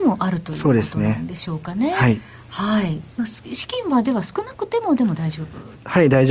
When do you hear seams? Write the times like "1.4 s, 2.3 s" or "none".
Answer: 3.1 s